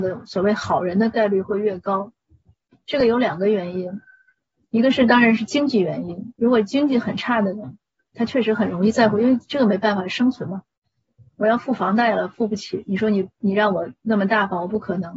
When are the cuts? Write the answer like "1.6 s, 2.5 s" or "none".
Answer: none